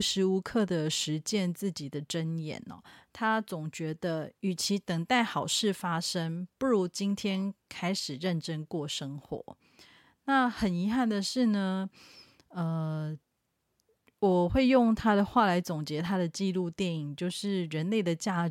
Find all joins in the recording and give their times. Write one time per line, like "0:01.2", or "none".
none